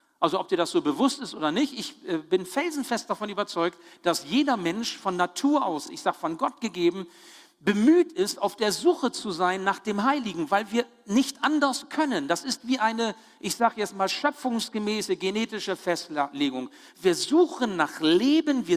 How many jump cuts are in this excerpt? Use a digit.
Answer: 0